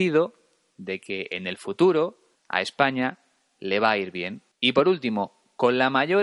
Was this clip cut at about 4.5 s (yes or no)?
yes